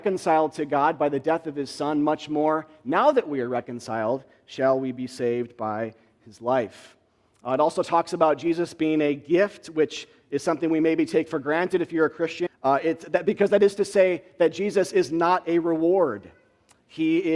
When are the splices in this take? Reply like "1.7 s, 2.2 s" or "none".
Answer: 12.5 s